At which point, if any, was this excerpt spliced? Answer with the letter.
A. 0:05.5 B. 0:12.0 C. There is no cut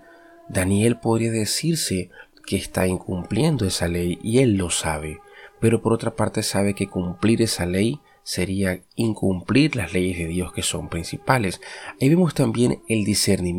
C